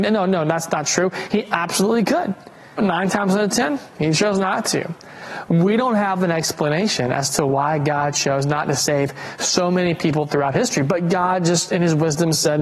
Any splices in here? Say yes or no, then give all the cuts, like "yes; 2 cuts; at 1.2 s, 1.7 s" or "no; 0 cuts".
yes; 1 cut; at 2.8 s